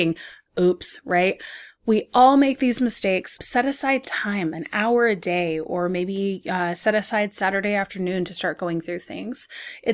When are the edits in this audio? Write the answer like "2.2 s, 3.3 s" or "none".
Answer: 3.4 s